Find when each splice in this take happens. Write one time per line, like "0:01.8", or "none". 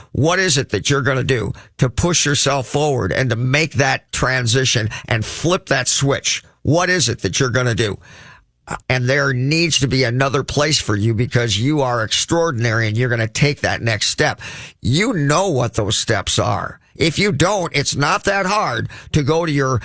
0:08.8